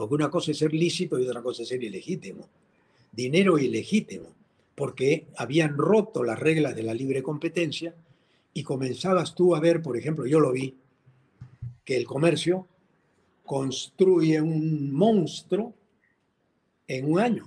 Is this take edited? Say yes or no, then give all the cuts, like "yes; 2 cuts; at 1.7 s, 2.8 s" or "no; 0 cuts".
no; 0 cuts